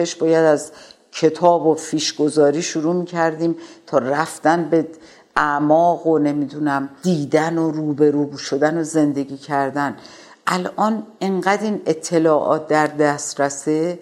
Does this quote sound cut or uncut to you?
uncut